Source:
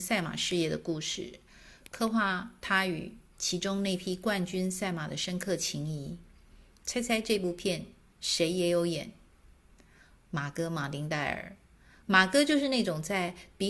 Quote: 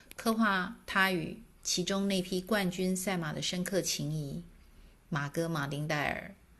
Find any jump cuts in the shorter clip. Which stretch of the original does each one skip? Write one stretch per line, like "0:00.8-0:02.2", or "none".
0:06.7-0:10.2